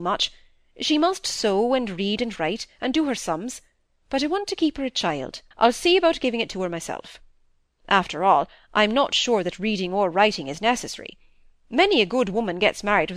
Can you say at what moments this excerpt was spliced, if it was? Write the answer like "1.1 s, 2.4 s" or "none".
5.5 s